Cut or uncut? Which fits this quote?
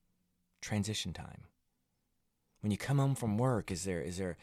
uncut